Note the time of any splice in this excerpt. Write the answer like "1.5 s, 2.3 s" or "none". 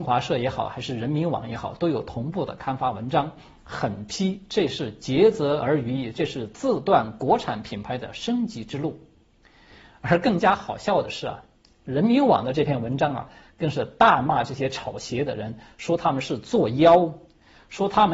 none